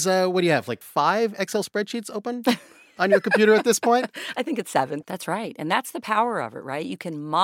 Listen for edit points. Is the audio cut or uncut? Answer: cut